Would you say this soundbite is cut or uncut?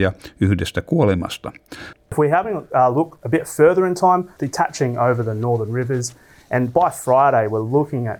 cut